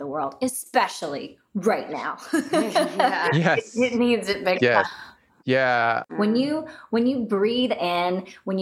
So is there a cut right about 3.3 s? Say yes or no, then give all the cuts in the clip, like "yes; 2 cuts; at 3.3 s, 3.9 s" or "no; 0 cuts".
no; 2 cuts; at 4.8 s, 6.1 s